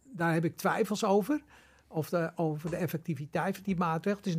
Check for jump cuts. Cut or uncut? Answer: uncut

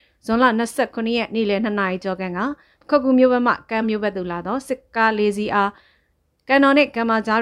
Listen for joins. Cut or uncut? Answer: cut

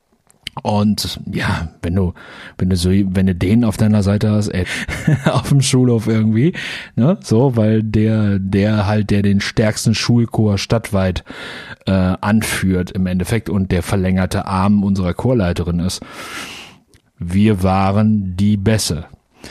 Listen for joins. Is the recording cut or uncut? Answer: cut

